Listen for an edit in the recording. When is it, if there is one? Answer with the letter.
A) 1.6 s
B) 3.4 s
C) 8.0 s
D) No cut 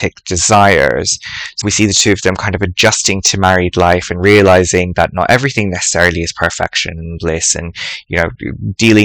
A